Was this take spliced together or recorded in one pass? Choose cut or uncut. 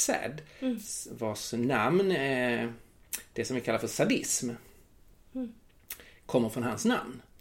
uncut